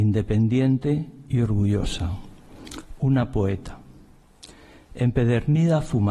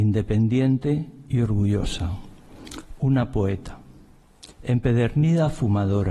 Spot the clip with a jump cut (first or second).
second